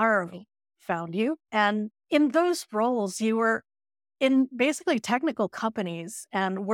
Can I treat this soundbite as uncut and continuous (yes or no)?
no